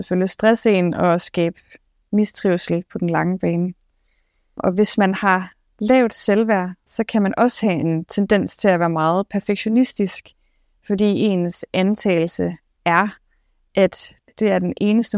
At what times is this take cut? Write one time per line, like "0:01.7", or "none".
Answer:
none